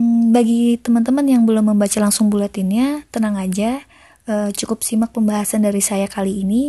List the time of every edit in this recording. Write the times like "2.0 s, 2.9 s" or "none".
none